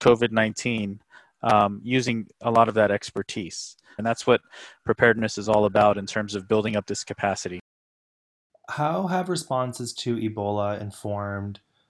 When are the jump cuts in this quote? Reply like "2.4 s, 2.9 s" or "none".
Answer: 4.0 s